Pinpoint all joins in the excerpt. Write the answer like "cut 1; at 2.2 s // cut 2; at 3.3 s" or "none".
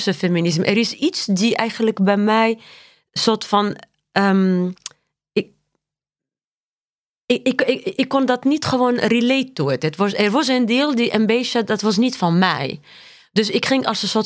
none